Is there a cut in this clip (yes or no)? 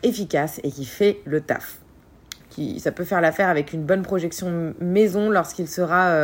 yes